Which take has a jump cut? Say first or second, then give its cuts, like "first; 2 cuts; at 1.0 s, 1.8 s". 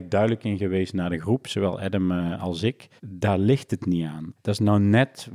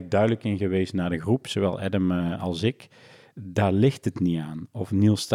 first; 2 cuts; at 3.0 s, 4.4 s